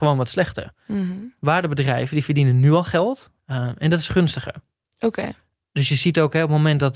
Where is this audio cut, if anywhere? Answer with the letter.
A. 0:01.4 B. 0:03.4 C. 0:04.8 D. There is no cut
B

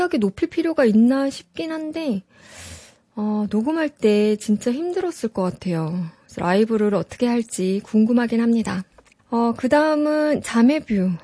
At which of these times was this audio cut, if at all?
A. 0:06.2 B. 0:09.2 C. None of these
B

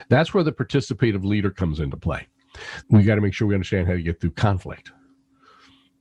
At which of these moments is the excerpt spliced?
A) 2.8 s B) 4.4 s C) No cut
A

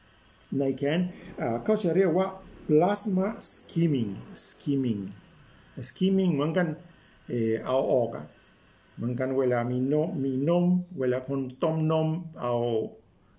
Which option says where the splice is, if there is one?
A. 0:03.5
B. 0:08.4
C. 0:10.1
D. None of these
D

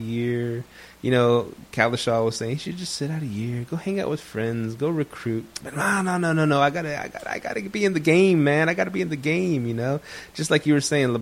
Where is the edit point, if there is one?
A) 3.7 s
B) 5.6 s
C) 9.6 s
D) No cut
B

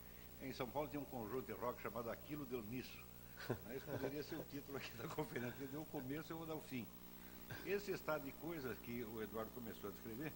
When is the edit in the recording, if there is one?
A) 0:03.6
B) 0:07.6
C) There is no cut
C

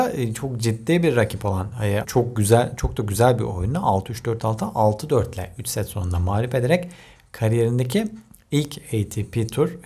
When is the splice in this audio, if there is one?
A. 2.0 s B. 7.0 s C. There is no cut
A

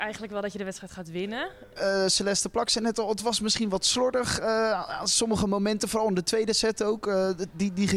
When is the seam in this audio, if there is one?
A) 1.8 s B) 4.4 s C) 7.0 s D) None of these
A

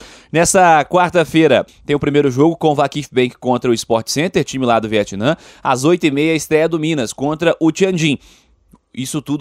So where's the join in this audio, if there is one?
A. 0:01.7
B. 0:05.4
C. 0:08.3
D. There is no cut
A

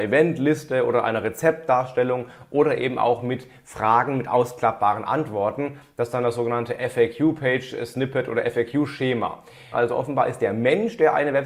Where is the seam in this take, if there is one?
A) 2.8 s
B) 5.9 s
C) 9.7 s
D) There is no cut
C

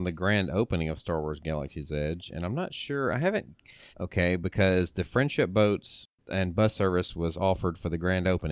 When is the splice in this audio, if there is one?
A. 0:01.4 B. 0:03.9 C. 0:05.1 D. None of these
B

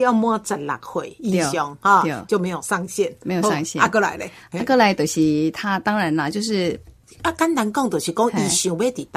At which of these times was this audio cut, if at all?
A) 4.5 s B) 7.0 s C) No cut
B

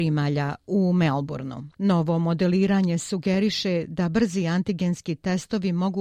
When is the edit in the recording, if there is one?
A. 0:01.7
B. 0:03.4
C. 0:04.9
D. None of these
A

